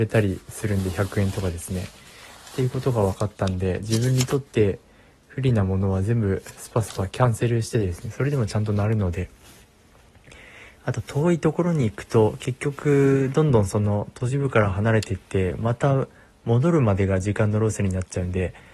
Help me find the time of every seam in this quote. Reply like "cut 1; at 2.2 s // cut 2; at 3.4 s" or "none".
none

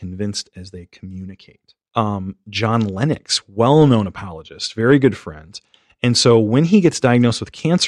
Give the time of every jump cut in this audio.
cut 1; at 1.9 s

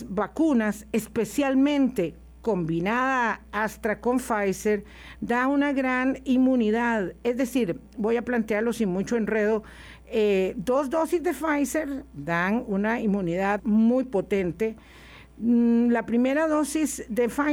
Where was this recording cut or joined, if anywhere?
cut 1; at 13.6 s

